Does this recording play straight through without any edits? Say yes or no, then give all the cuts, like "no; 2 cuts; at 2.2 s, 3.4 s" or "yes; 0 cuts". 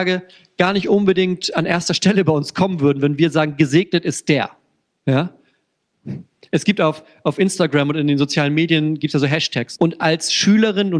no; 1 cut; at 9.8 s